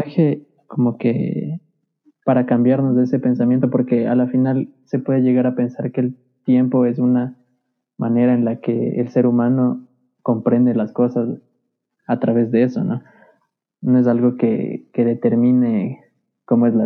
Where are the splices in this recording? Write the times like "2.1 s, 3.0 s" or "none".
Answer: none